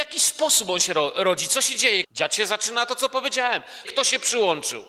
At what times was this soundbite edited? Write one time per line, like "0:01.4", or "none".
0:02.0
0:03.8